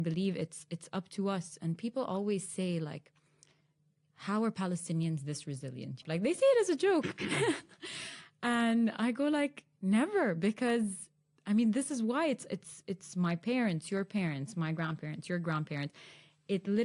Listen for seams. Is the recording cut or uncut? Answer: cut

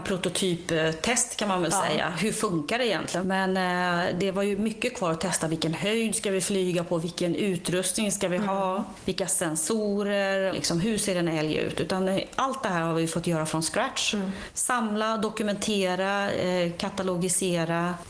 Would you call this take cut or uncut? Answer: cut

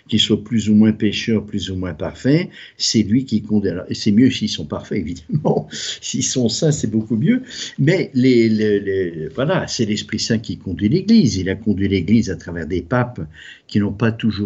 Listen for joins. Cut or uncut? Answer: uncut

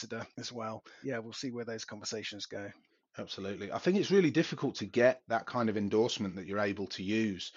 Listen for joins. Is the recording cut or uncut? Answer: cut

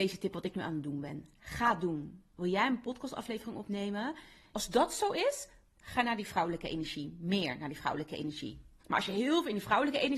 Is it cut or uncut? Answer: cut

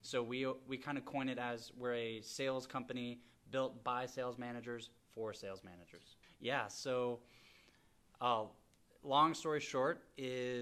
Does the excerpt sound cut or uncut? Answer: cut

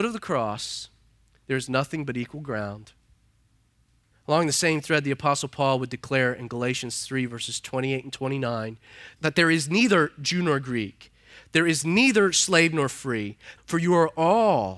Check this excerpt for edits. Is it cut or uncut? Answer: cut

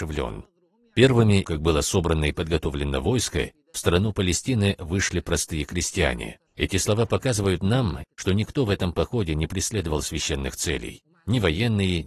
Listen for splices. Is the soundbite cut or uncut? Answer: cut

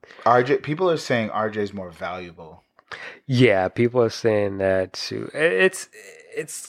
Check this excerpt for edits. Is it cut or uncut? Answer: uncut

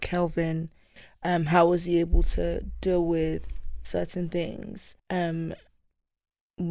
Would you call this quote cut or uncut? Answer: cut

